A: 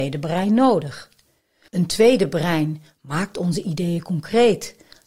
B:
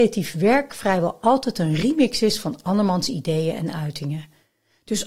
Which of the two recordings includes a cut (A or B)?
A